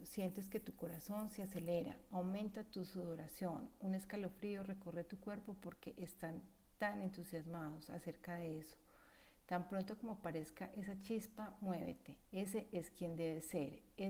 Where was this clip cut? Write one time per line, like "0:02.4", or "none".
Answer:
0:12.3